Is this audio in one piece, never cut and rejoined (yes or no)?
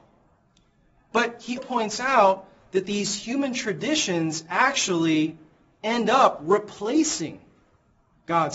no